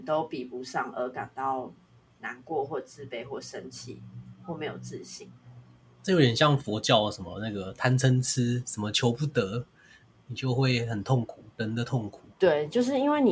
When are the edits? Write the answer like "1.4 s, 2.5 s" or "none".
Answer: 11.5 s